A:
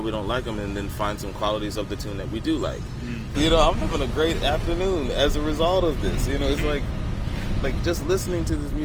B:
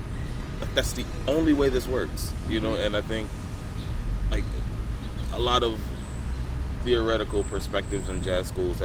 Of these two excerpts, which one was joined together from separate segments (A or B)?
A